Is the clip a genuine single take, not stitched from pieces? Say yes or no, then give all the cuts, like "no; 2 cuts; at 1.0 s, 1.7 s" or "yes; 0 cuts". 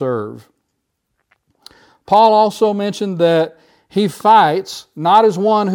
yes; 0 cuts